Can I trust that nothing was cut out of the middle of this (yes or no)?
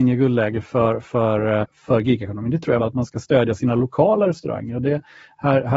no